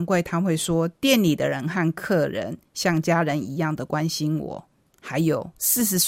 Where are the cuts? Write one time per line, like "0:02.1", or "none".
none